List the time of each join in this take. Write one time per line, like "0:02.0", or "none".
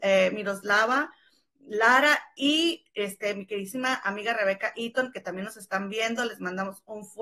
none